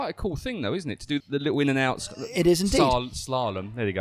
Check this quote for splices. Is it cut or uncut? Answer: cut